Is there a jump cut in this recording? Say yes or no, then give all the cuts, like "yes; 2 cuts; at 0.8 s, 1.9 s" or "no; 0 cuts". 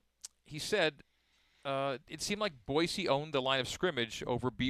no; 0 cuts